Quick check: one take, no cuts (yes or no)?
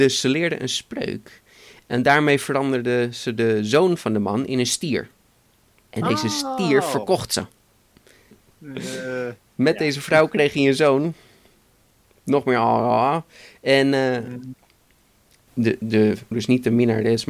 no